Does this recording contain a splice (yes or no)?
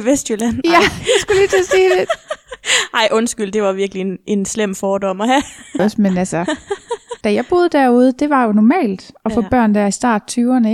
yes